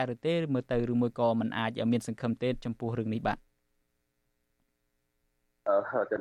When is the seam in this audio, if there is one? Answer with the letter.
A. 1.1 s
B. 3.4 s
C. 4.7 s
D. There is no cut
D